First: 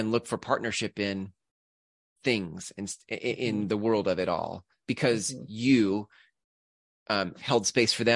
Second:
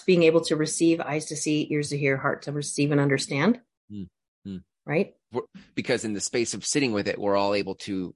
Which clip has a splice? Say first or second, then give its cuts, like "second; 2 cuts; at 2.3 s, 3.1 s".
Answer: second; 1 cut; at 5.3 s